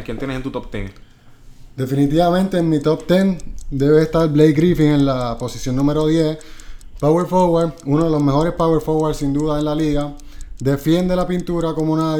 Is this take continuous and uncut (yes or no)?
yes